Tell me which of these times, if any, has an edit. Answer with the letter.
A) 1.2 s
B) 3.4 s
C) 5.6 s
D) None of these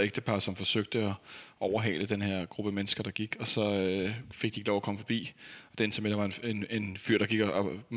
D